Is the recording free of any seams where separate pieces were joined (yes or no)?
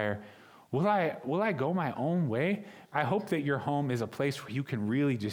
no